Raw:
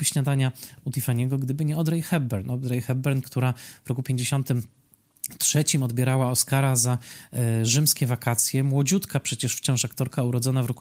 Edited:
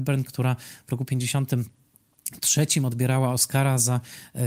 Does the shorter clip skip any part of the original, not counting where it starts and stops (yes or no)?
no